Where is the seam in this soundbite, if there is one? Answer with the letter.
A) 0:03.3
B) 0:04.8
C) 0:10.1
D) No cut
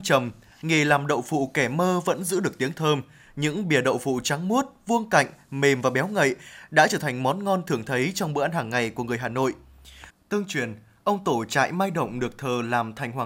C